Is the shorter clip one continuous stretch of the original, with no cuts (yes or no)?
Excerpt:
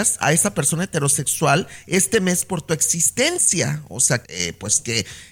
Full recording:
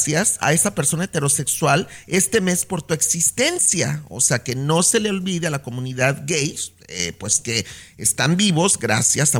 no